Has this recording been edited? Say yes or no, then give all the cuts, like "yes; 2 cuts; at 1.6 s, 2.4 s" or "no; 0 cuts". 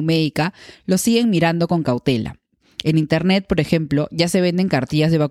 no; 0 cuts